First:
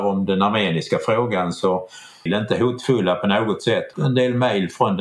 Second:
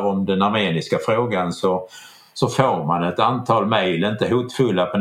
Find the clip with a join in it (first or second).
first